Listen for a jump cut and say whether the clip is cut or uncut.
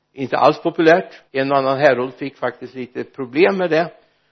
cut